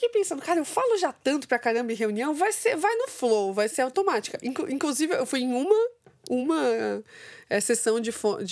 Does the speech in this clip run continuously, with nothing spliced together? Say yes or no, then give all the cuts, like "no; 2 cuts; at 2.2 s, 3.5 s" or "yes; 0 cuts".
yes; 0 cuts